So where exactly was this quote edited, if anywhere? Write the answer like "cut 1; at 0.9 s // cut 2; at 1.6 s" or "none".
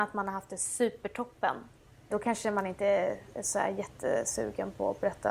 cut 1; at 2.1 s